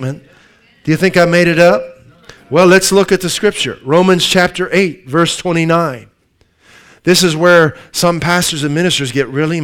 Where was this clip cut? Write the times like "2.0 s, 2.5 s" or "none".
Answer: none